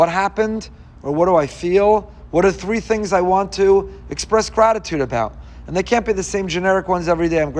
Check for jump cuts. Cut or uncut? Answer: cut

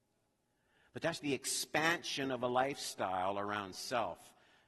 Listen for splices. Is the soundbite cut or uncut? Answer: cut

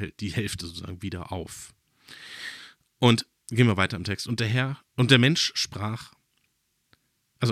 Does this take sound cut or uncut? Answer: uncut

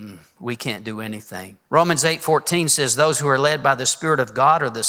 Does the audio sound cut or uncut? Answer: cut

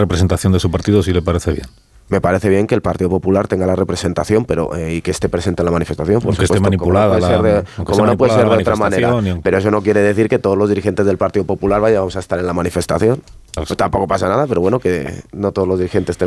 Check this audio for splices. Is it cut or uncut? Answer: cut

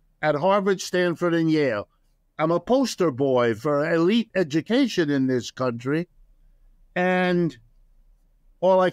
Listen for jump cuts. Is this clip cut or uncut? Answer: uncut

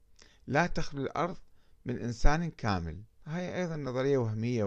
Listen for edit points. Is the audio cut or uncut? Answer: cut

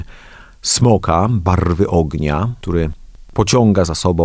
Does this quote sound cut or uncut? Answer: uncut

